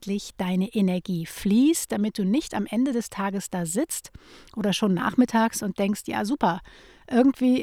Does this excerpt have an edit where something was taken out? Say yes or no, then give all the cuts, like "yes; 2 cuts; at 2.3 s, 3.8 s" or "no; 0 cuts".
no; 0 cuts